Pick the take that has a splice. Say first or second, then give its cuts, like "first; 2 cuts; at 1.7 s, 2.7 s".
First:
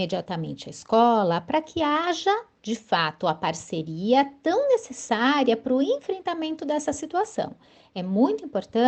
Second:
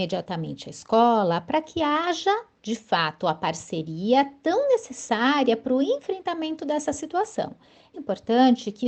second; 1 cut; at 7.9 s